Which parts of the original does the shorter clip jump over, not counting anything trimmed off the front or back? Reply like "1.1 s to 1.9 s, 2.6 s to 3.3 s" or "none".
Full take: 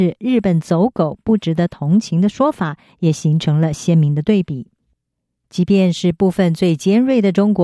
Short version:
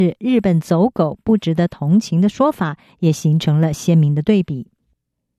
none